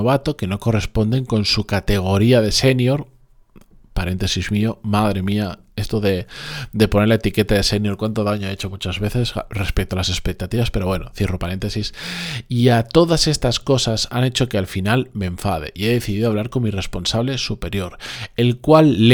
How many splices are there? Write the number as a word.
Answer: zero